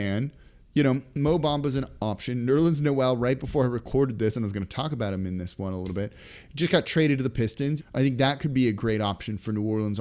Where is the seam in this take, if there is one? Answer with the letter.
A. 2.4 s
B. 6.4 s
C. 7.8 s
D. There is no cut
C